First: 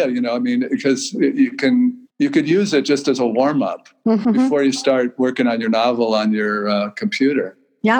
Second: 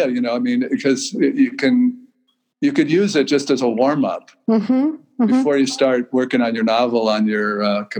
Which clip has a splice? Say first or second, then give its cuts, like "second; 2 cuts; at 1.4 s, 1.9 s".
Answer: first; 2 cuts; at 2.1 s, 4.2 s